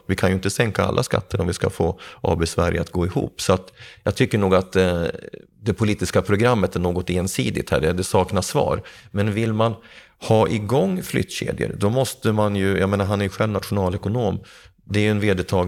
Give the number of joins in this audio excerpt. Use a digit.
0